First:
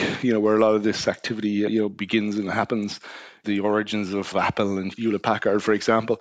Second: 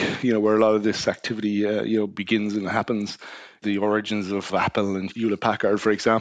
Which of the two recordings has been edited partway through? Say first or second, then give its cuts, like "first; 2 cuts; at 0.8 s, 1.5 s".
first; 1 cut; at 1.7 s